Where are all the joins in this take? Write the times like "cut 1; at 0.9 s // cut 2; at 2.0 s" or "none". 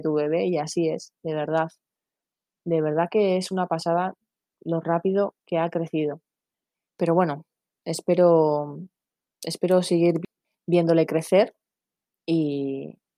none